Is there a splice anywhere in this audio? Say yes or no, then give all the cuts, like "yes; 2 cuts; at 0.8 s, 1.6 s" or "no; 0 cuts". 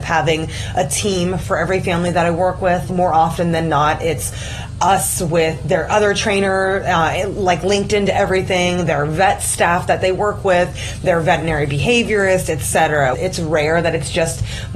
yes; 2 cuts; at 2.9 s, 13.1 s